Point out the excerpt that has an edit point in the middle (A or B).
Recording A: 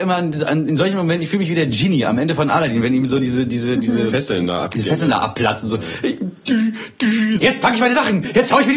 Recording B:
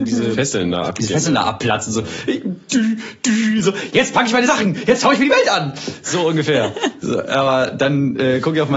A